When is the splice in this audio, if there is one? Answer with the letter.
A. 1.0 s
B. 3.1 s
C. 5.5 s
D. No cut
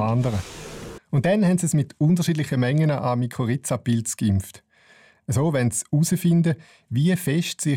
A